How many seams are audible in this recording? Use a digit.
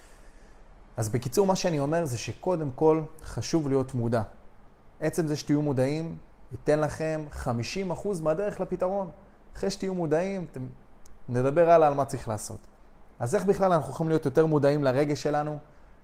1